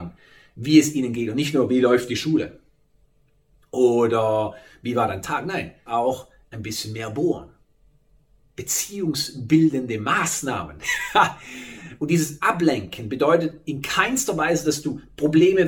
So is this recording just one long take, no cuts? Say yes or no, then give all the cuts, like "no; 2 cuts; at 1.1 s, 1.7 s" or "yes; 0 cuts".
no; 1 cut; at 5.9 s